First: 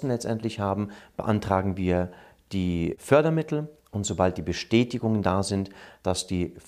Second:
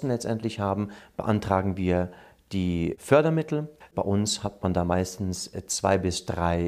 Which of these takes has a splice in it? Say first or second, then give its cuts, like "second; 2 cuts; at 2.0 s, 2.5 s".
second; 1 cut; at 3.8 s